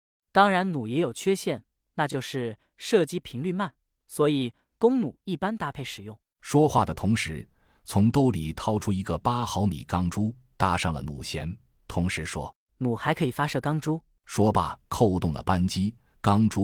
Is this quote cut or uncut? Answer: uncut